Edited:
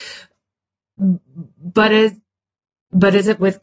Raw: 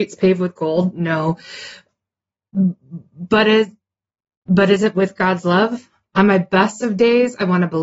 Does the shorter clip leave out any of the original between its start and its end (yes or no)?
no